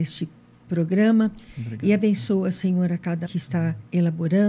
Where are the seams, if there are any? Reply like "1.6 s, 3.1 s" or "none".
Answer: 3.3 s

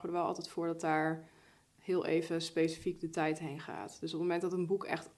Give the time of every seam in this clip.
none

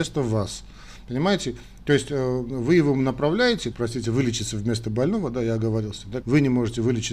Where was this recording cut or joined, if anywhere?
3.7 s, 6.2 s

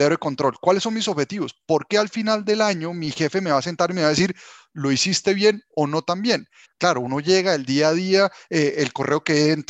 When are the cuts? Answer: 6.6 s

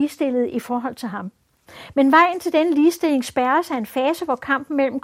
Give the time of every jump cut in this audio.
none

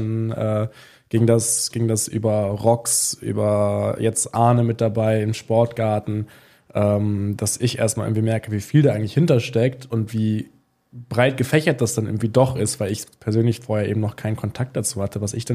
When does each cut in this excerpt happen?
none

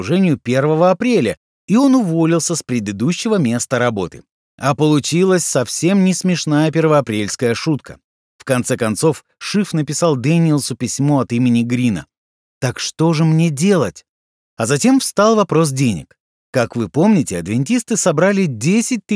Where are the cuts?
8.3 s

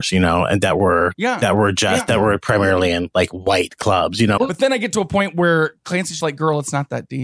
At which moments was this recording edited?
4.4 s, 6.2 s

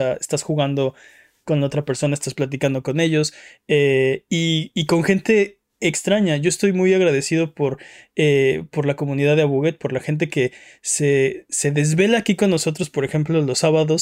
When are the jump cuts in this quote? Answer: none

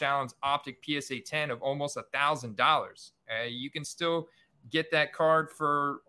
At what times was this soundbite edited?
none

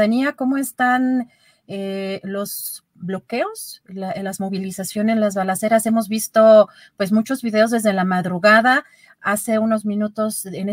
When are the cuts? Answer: none

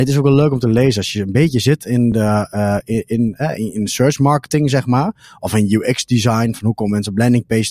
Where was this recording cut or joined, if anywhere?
none

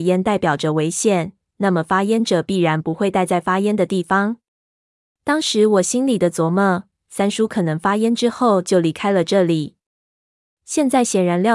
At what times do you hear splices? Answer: none

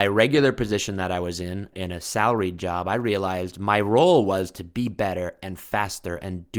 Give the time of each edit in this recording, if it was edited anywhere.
1.7 s

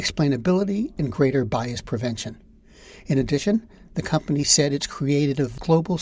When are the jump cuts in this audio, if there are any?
none

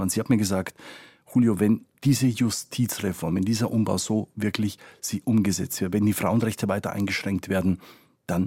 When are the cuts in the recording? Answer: 1.9 s

